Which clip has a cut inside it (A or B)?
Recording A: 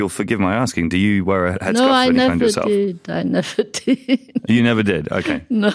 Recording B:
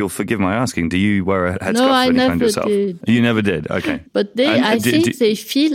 B